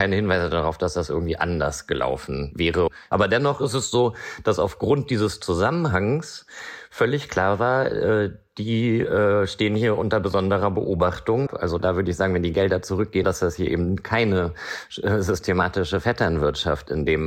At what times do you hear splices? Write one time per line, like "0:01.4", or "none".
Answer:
0:11.5
0:13.2

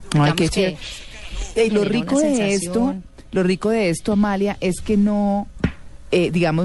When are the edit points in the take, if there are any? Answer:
0:01.7

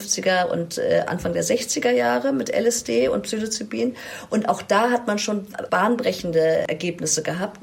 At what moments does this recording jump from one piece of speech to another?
0:05.7

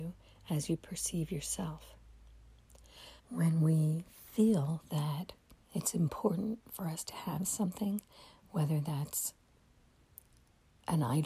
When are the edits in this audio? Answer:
0:03.2
0:05.6

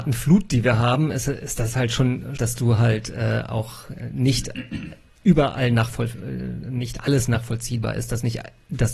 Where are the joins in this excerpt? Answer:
0:02.4

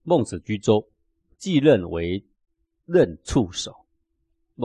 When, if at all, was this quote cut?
none

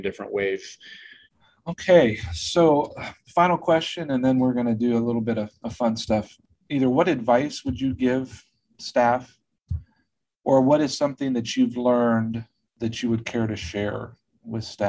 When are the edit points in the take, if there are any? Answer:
none

